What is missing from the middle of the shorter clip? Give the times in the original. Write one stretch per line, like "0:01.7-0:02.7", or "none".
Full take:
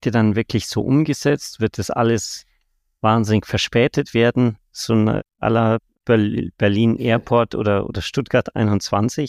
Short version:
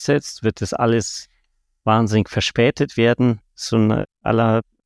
none